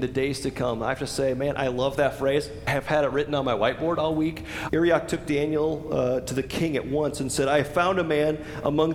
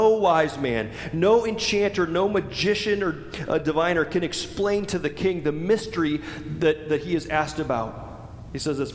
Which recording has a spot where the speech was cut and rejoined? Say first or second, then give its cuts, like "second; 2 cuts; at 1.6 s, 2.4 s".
first; 1 cut; at 4.7 s